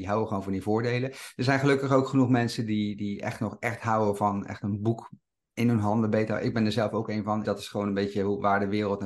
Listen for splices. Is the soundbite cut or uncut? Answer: cut